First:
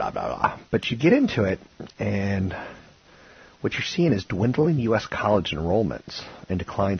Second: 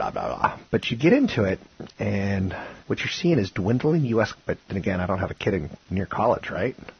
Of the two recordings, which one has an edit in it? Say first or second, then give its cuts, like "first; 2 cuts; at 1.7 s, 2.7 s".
second; 2 cuts; at 2.8 s, 4.3 s